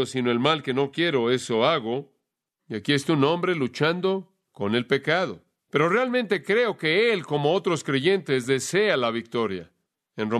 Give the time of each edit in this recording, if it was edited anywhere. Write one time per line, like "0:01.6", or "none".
none